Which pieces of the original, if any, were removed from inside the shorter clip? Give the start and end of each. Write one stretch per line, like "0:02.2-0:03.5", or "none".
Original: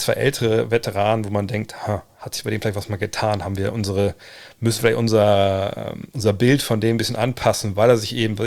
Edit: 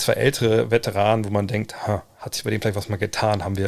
none